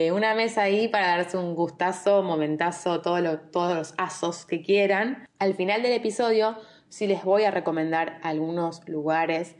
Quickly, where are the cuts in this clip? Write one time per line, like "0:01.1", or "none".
0:05.3